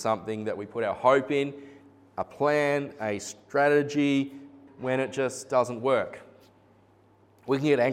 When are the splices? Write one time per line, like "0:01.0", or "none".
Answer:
0:04.7